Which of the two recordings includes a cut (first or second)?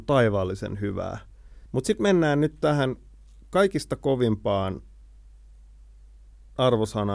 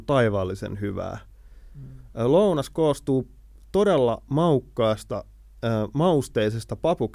first